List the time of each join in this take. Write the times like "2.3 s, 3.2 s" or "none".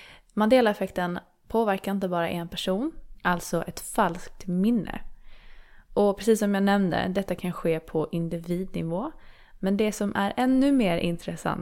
3.2 s